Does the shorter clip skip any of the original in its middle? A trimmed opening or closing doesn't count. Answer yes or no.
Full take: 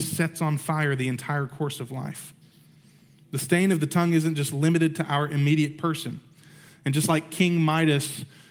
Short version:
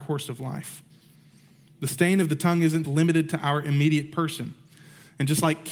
yes